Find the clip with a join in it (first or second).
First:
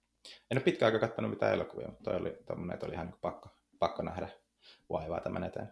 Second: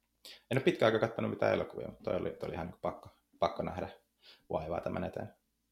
second